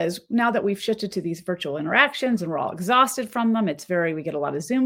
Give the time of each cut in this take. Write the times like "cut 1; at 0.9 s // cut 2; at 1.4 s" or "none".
none